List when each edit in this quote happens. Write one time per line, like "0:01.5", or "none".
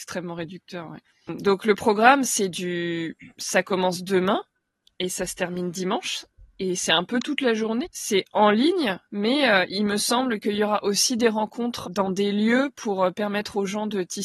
0:07.8
0:09.1
0:11.8